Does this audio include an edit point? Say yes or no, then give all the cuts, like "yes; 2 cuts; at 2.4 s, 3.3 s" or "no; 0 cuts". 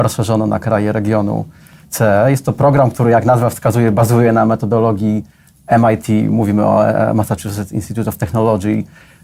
no; 0 cuts